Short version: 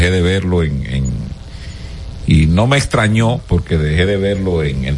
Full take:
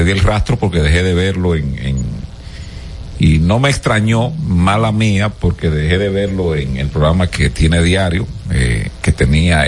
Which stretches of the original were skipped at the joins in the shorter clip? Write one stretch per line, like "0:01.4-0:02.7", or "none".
0:04.3-0:05.3